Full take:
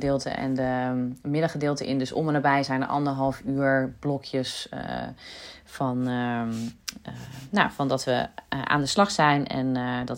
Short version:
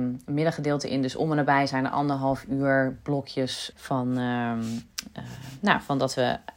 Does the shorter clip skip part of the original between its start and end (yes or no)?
yes